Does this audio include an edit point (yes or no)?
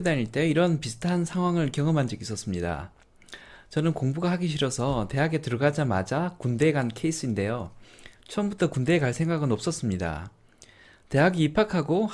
no